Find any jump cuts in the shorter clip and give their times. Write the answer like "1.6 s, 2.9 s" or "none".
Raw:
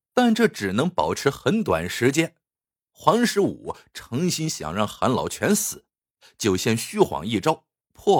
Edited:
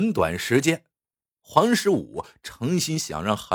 none